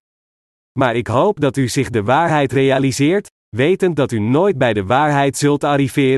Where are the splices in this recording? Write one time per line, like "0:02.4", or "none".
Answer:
none